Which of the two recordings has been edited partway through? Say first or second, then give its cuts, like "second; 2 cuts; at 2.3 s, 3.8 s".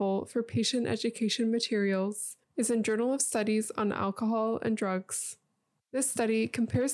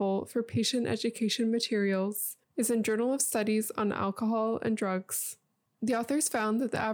second; 1 cut; at 5.7 s